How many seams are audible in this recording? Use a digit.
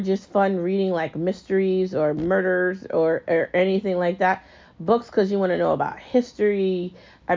0